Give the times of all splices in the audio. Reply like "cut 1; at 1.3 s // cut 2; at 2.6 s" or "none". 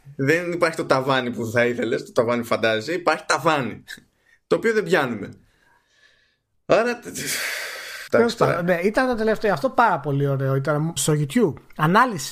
cut 1; at 8.1 s // cut 2; at 11.0 s